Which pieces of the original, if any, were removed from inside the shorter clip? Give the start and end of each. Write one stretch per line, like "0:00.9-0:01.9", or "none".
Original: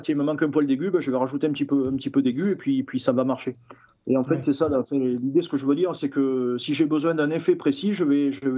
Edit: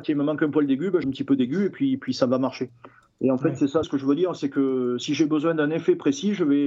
0:01.0-0:01.9
0:04.7-0:05.4